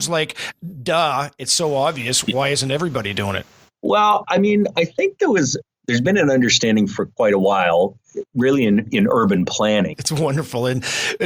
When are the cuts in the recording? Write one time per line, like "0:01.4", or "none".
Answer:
0:04.2
0:09.9